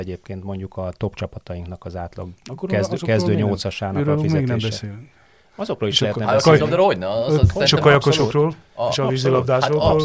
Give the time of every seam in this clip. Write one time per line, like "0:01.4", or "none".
none